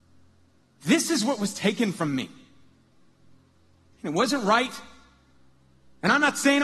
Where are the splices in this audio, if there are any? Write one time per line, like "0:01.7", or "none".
0:03.9